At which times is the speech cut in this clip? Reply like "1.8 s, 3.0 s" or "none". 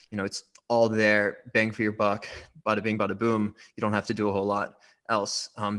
none